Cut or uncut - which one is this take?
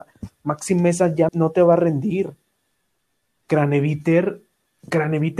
cut